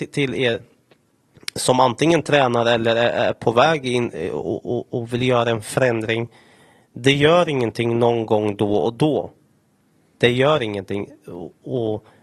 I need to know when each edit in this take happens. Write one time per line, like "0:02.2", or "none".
none

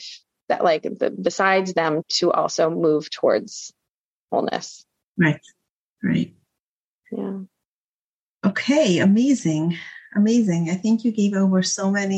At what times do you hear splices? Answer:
none

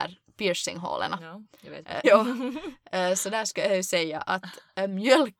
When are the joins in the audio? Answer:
0:02.0

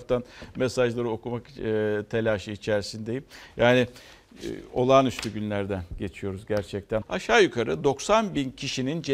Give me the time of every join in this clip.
0:07.0

